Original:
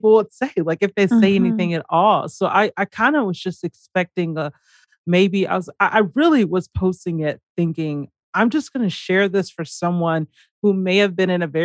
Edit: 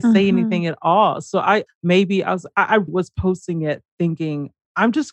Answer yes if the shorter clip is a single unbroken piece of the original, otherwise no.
no